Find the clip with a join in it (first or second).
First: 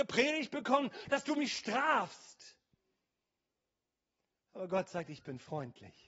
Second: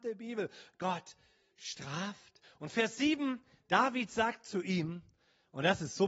second